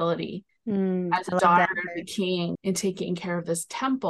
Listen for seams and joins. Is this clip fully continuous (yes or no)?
no